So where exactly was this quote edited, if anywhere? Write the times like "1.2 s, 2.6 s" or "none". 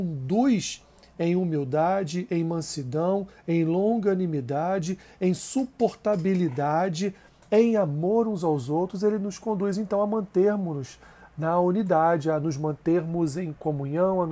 none